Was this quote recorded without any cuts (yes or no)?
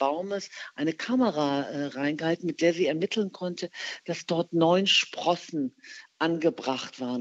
yes